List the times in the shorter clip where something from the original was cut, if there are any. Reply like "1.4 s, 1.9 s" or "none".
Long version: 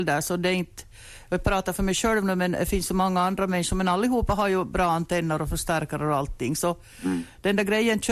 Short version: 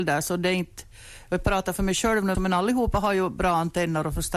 2.3 s